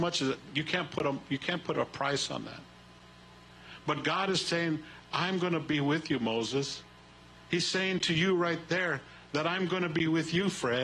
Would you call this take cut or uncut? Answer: uncut